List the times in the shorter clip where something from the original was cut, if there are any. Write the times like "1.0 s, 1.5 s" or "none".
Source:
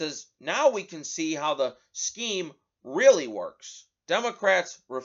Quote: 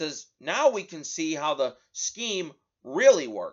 none

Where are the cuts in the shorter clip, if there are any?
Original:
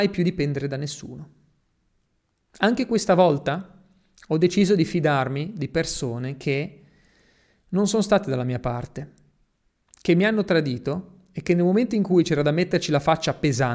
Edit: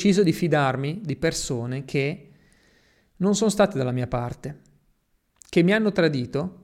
none

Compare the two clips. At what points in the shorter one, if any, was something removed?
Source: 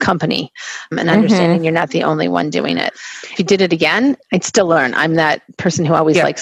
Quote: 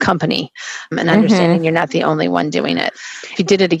none

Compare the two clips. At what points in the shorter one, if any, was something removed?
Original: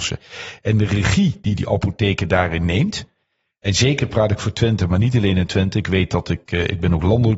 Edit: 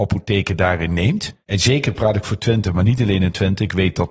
1.4 s

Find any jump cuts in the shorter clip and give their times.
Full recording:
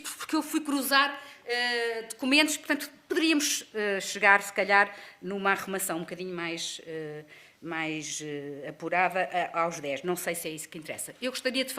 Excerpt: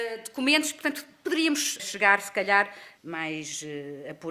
1.8 s, 3.0 s

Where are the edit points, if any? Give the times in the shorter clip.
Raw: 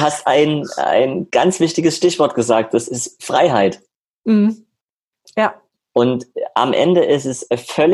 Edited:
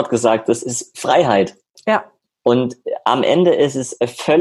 1.7 s

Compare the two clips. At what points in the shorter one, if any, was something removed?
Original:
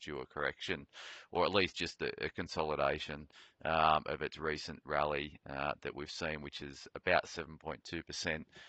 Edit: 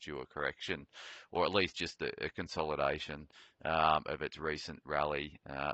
none

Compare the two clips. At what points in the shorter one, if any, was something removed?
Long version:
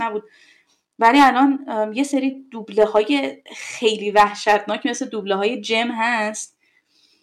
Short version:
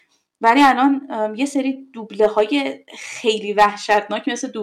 none

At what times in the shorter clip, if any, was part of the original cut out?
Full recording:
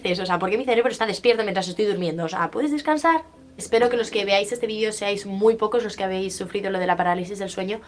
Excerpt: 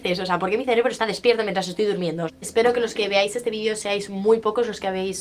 2.3 s

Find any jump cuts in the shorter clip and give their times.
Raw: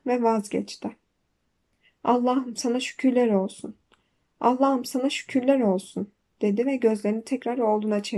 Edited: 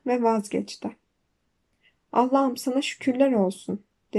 1.9 s

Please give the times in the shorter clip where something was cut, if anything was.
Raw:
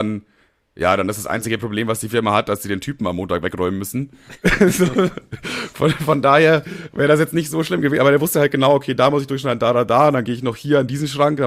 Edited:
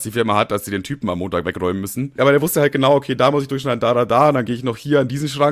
2.2 s

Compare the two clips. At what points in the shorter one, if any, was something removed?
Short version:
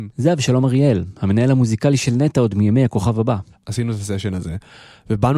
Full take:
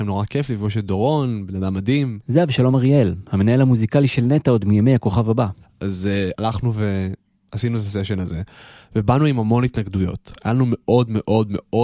3.6 s

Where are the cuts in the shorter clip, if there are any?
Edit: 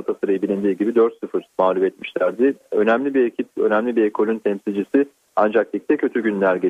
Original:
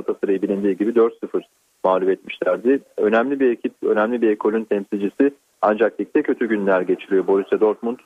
1.5 s

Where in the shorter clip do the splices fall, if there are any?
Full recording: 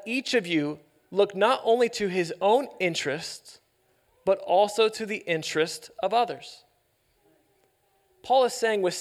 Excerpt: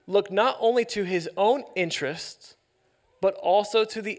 none

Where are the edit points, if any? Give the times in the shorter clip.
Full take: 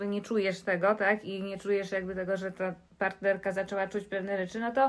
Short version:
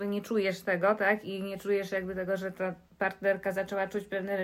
none

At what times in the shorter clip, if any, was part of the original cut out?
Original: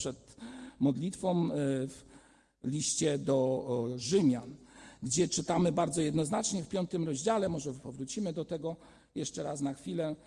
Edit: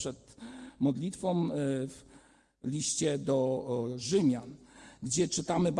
none

